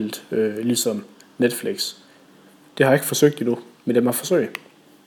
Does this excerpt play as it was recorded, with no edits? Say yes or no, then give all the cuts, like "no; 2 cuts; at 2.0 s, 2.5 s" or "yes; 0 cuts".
yes; 0 cuts